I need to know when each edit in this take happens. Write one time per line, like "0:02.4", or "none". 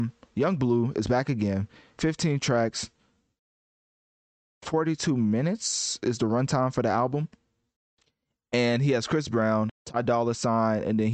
0:09.7